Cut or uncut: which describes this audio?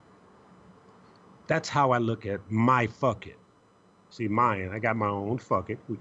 uncut